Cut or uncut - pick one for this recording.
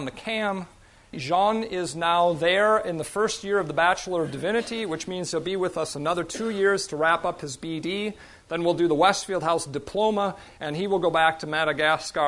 cut